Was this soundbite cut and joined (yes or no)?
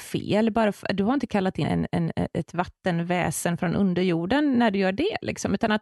yes